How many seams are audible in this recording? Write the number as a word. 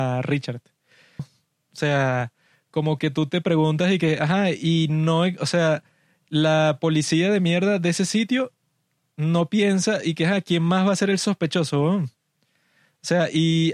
one